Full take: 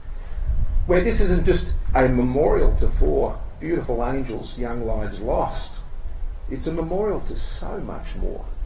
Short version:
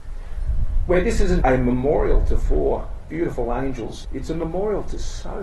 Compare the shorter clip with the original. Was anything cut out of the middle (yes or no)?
yes